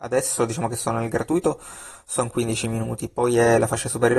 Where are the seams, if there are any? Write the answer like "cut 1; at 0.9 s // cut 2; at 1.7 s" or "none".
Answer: none